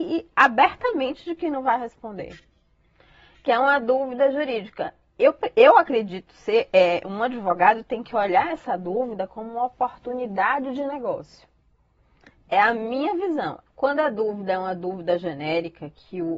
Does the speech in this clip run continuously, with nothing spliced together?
no; 1 cut; at 13.7 s

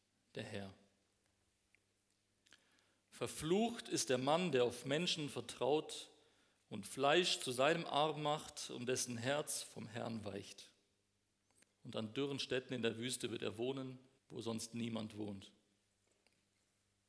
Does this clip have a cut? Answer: yes; 2 cuts; at 11.6 s, 14.2 s

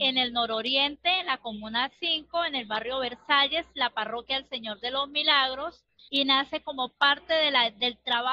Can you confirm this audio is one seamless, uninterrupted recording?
no; 1 cut; at 6.1 s

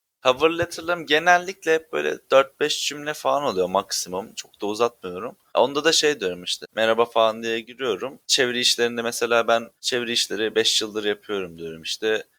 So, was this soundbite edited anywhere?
no; 0 cuts

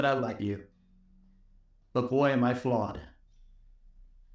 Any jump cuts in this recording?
no; 0 cuts

